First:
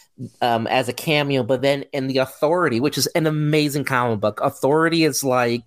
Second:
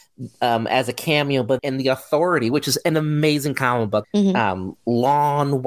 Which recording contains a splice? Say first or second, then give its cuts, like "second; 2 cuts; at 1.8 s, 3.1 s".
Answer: second; 2 cuts; at 1.6 s, 4.0 s